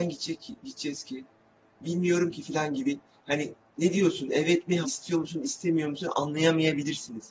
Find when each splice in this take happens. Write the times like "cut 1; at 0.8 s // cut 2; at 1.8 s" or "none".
cut 1; at 4.8 s

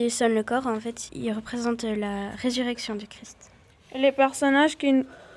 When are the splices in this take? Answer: cut 1; at 1.1 s

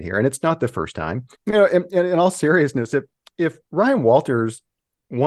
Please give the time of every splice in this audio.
cut 1; at 1.3 s

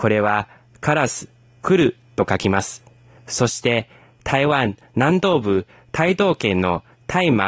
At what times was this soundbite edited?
none

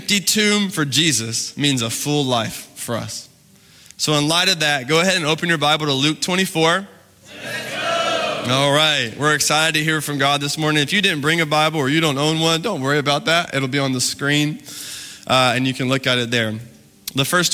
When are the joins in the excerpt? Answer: none

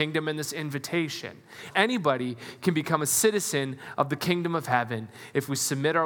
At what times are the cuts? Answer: cut 1; at 1.7 s

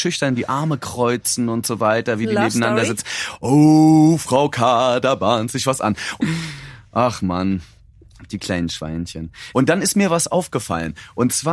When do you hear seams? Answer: cut 1; at 6.2 s // cut 2; at 9.5 s

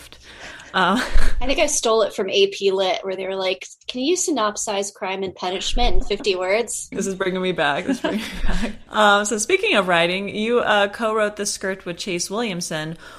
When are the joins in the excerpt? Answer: cut 1; at 8.9 s

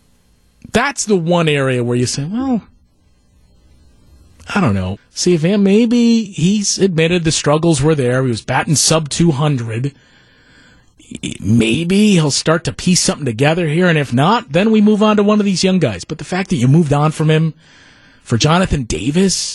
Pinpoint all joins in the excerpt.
cut 1; at 5.0 s

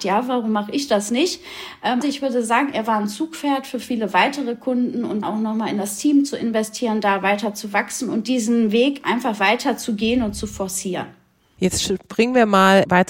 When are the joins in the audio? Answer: cut 1; at 2.0 s // cut 2; at 5.2 s

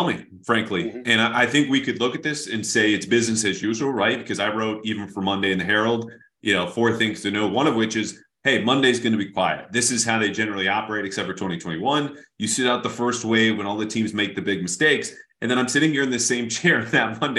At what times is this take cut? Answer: none

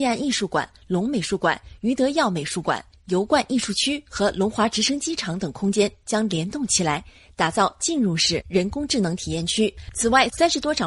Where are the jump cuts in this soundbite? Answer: none

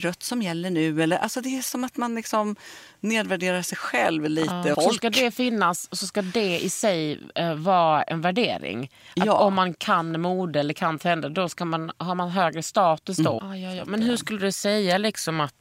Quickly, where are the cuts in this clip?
cut 1; at 4.7 s // cut 2; at 13.4 s

